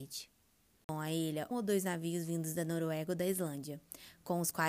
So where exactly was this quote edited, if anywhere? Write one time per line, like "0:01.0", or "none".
0:01.5